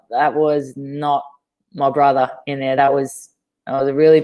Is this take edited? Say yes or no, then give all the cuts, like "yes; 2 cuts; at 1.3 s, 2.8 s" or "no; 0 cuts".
no; 0 cuts